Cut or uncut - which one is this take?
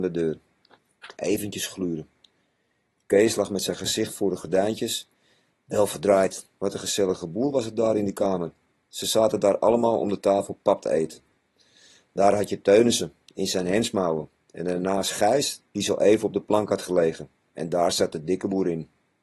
cut